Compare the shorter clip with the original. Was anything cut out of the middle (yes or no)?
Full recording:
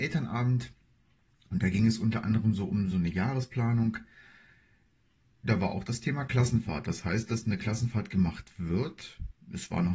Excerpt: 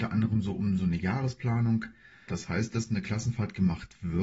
yes